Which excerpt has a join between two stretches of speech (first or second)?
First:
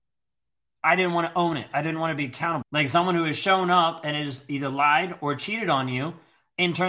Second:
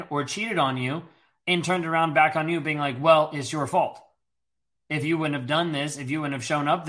first